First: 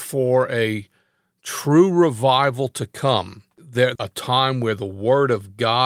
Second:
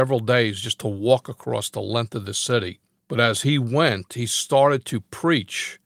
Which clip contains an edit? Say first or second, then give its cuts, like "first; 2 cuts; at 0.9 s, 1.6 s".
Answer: first; 1 cut; at 3.9 s